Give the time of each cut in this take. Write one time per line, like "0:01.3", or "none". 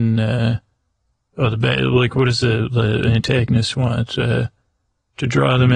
none